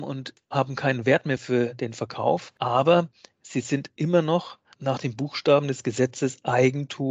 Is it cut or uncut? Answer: cut